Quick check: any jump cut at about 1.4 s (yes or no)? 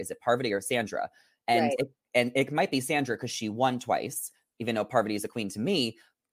no